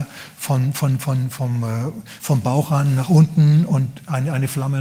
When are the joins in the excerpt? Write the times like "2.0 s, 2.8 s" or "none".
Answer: none